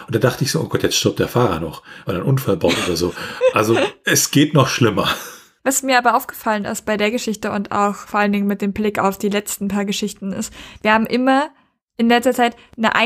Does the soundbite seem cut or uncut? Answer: cut